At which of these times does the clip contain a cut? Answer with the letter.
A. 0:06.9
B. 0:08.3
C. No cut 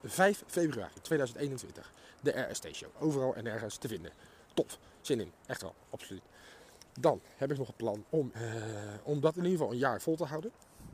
B